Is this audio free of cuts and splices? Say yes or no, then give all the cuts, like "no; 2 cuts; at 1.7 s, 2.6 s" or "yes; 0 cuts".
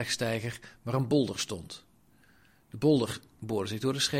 yes; 0 cuts